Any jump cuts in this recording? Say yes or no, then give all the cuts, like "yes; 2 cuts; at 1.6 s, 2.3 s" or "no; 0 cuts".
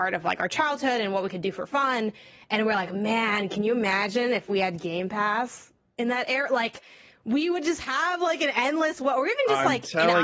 no; 0 cuts